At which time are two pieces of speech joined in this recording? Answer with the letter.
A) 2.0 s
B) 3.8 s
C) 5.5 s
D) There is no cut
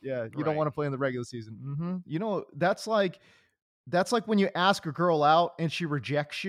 A